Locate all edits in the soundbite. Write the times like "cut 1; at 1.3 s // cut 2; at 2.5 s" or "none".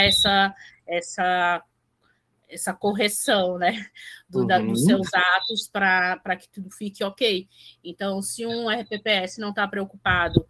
none

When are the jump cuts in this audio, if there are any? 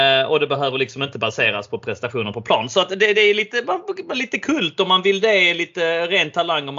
none

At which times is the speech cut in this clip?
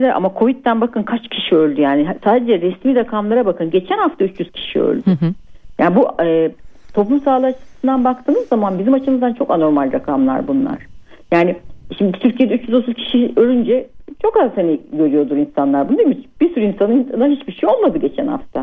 none

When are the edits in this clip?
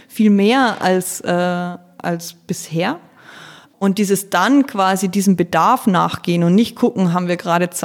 none

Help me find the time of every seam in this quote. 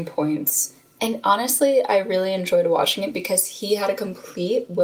cut 1; at 1.0 s

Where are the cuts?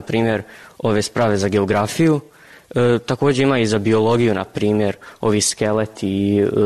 none

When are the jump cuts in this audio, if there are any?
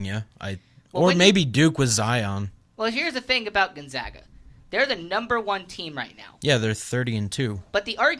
none

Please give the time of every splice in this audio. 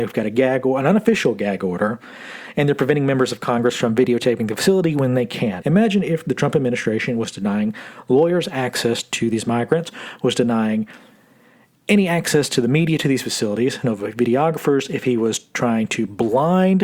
cut 1; at 5.6 s // cut 2; at 13.8 s

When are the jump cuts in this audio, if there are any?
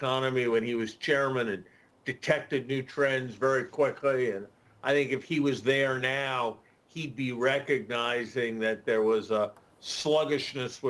none

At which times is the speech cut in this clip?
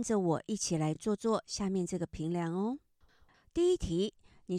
none

